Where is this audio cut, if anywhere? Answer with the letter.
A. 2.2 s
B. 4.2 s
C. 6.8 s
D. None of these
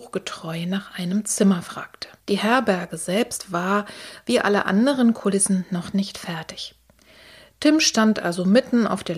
A